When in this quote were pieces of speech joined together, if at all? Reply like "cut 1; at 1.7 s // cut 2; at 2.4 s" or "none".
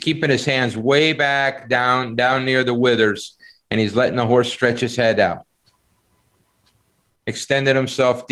none